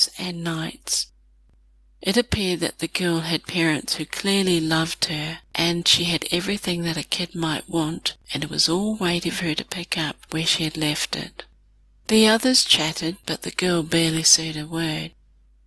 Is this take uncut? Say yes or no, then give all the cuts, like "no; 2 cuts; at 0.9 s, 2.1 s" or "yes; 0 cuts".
yes; 0 cuts